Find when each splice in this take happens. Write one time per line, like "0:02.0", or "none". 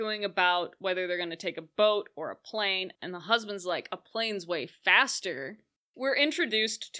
0:03.0
0:05.8